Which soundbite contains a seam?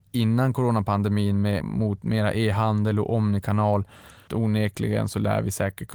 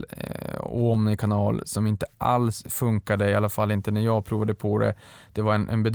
first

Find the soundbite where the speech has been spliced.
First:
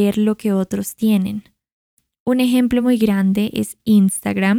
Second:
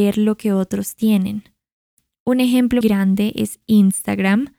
second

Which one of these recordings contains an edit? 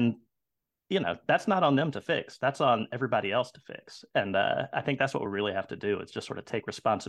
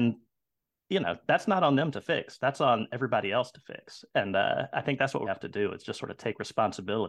second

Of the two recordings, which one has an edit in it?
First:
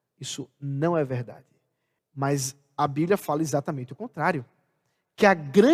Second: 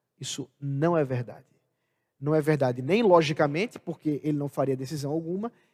first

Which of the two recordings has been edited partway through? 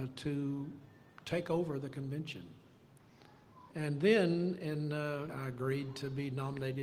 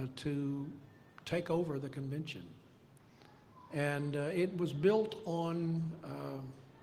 first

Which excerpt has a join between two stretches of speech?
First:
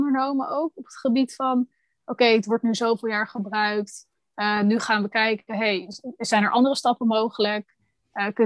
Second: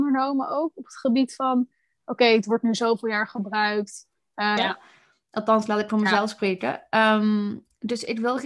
second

